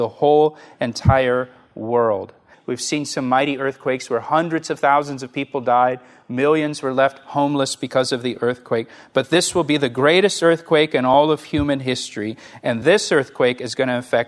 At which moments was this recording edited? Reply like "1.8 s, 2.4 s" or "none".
2.5 s